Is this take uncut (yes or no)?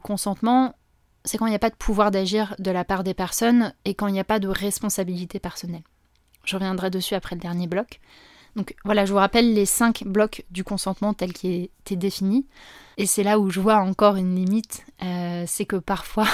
no